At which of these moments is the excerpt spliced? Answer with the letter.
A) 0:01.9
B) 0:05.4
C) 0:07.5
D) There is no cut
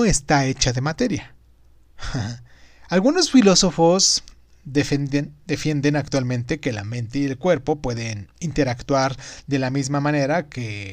A